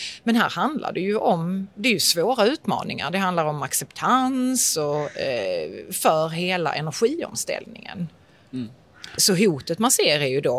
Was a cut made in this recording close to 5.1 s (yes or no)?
no